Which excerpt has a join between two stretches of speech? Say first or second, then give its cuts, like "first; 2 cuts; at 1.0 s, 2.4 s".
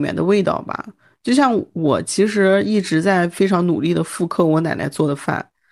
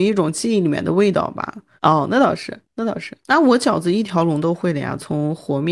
second; 2 cuts; at 1.8 s, 3.2 s